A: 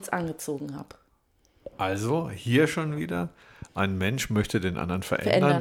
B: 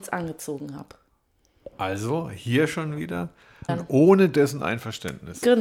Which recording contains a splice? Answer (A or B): B